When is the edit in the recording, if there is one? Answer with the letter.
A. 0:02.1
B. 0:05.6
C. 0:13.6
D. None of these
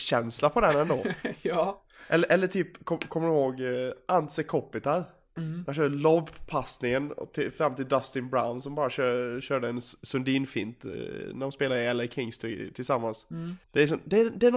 C